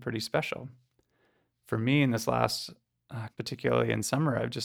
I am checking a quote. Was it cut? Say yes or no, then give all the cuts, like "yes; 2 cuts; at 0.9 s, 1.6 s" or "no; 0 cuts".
yes; 1 cut; at 3.3 s